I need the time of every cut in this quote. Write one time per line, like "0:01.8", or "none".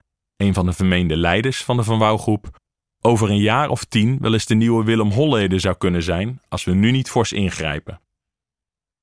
none